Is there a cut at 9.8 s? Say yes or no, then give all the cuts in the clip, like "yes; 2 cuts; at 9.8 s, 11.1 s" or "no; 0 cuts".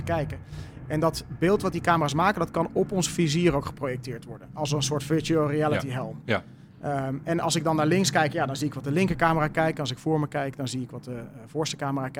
no; 0 cuts